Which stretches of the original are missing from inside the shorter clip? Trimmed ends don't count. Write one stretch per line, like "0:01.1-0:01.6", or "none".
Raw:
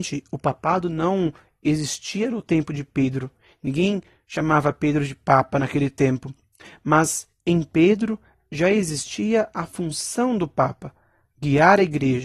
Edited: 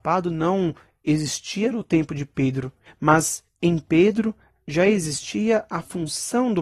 0:03.4-0:06.7